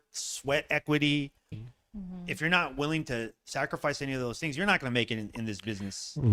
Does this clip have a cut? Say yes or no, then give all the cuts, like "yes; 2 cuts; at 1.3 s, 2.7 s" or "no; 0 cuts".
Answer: yes; 1 cut; at 1.5 s